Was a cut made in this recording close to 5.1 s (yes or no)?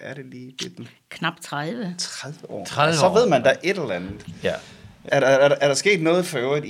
yes